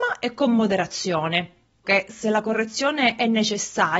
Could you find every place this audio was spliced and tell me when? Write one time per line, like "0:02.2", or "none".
0:01.8